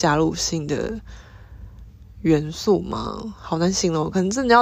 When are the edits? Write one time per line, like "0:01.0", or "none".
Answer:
none